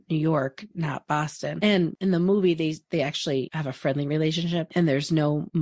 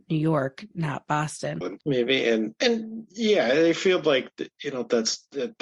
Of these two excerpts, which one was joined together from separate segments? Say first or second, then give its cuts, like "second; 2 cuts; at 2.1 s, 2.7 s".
second; 1 cut; at 1.6 s